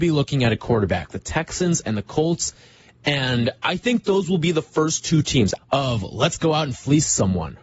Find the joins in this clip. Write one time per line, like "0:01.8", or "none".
0:05.6